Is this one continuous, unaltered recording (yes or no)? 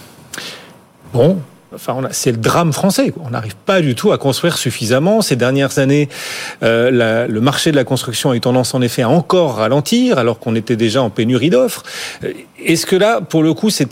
no